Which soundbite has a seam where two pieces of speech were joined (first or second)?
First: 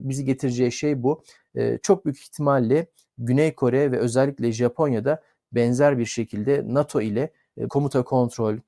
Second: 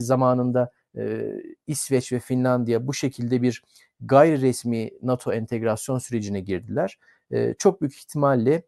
first